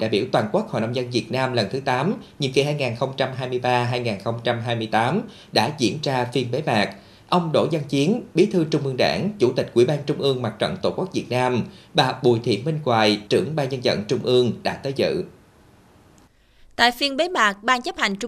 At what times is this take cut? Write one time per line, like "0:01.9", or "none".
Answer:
0:13.3